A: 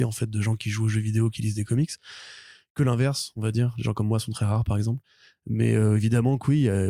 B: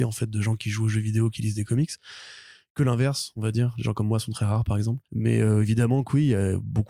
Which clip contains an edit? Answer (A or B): B